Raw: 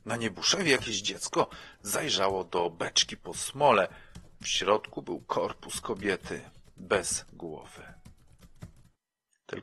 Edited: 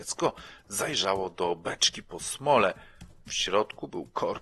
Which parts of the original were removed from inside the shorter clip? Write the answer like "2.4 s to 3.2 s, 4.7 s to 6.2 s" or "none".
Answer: none